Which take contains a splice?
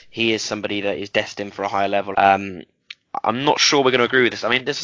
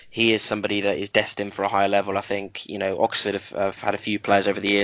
first; 1 cut; at 2.1 s

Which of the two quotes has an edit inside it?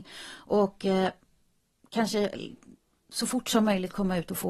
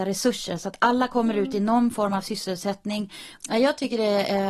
second; 1 cut; at 3.4 s

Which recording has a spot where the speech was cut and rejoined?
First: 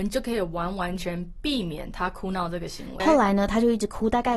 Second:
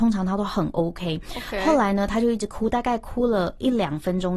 first; 2 cuts; at 1.0 s, 3.0 s

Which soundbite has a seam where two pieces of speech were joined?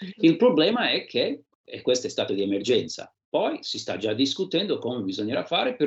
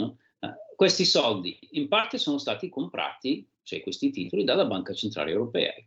first; 1 cut; at 1.5 s

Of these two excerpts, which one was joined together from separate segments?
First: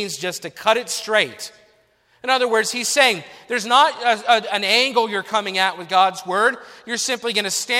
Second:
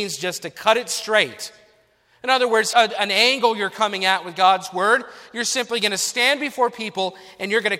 second; 1 cut; at 2.7 s

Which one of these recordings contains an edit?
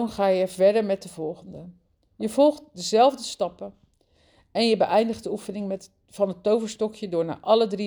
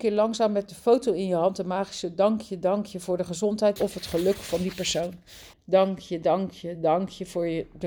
second; 2 cuts; at 3.8 s, 5.5 s

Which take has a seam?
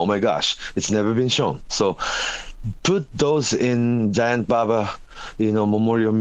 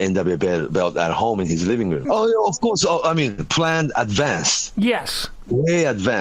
second; 1 cut; at 2.0 s

